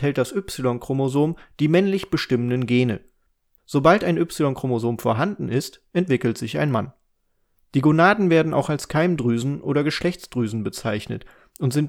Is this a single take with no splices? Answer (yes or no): no